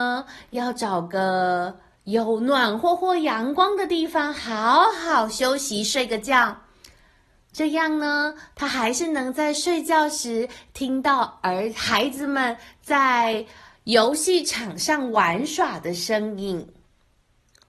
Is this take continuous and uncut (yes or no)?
yes